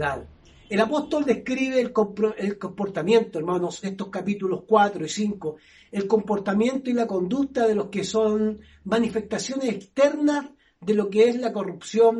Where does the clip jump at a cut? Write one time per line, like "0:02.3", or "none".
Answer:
0:03.8

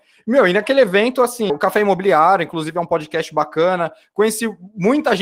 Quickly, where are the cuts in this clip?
0:01.5

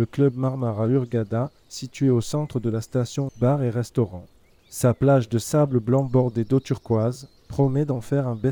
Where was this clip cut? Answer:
0:03.3
0:07.4

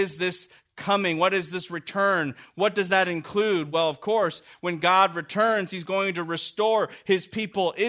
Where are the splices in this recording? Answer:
none

